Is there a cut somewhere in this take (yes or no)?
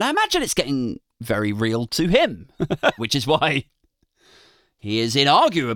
yes